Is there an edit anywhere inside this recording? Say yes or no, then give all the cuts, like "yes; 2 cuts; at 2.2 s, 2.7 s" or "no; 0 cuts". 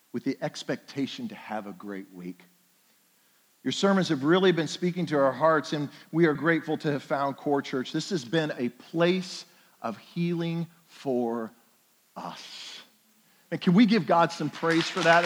yes; 1 cut; at 6.4 s